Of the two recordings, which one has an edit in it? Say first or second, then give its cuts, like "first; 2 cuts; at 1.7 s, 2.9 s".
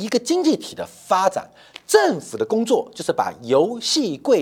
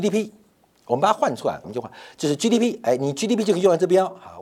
second; 1 cut; at 1.6 s